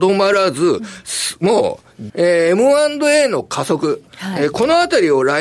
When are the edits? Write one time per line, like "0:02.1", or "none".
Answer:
0:02.1